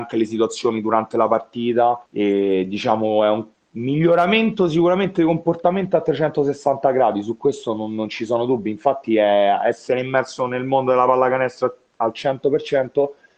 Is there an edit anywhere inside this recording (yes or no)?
yes